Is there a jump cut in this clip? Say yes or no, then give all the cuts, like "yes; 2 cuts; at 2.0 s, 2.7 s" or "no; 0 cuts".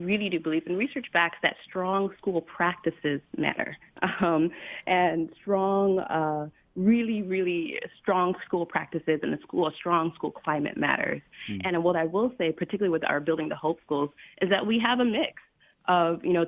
no; 0 cuts